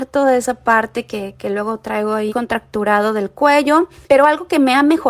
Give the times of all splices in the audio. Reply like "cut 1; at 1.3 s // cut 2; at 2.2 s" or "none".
cut 1; at 2.3 s